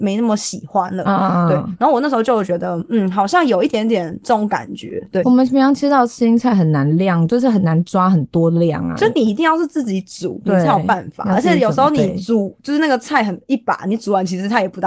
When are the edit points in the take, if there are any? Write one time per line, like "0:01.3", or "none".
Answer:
0:05.2